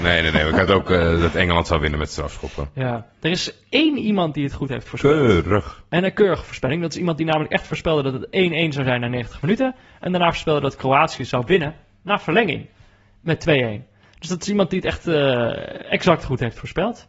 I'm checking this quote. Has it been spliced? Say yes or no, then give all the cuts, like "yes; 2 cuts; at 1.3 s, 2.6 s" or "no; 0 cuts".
no; 0 cuts